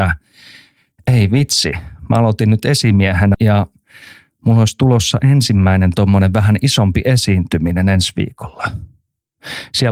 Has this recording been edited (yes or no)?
yes